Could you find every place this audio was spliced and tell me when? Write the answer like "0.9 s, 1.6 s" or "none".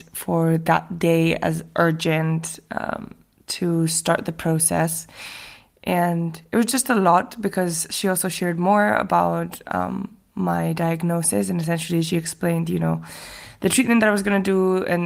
none